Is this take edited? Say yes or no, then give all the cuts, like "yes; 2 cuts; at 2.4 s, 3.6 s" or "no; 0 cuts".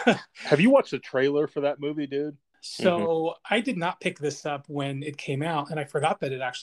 yes; 1 cut; at 2.5 s